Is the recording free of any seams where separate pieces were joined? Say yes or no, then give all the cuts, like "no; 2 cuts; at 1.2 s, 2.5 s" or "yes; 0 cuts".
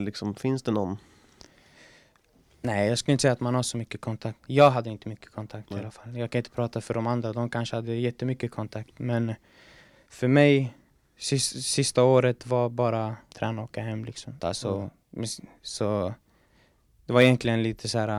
no; 2 cuts; at 13.3 s, 14.4 s